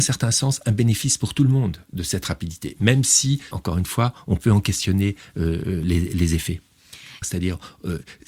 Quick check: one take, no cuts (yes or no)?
no